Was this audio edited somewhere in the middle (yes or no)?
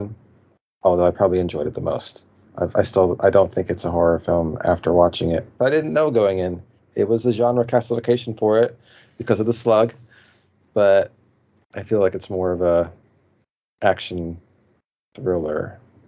no